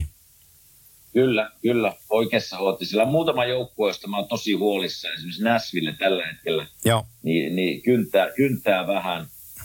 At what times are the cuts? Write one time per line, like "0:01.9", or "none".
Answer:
none